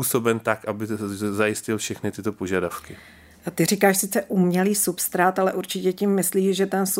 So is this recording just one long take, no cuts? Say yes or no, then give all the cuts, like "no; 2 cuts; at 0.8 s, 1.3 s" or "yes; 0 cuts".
yes; 0 cuts